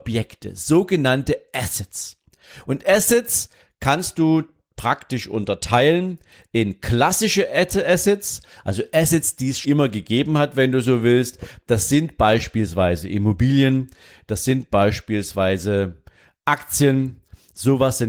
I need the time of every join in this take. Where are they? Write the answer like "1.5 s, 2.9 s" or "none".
9.6 s

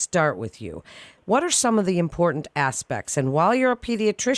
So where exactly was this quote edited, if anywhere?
1.2 s

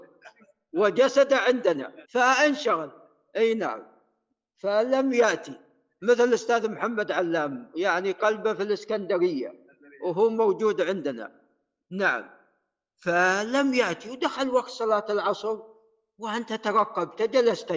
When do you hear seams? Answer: 2.0 s

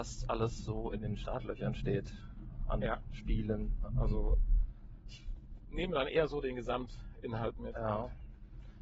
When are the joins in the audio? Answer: none

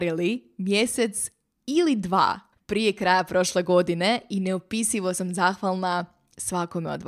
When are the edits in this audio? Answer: 2.5 s

